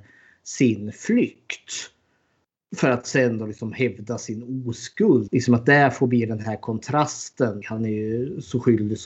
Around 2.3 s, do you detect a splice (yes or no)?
no